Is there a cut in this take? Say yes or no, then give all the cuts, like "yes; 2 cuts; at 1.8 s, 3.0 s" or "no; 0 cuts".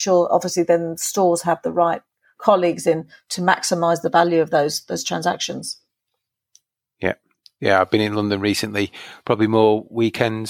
no; 0 cuts